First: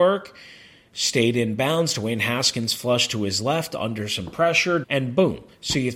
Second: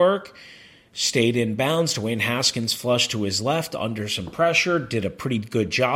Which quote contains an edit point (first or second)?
first